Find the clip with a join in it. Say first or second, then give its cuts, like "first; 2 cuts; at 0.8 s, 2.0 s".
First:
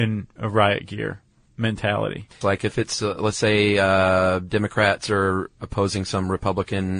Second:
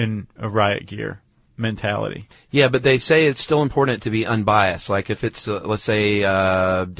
first; 1 cut; at 2.4 s